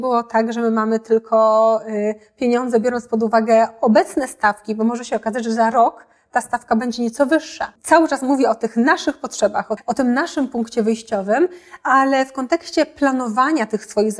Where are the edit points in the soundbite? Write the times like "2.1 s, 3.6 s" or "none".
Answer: 7.8 s, 9.8 s